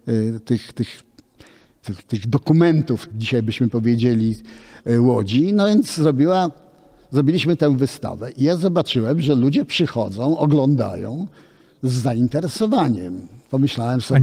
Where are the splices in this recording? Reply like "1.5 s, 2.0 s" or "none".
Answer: 3.1 s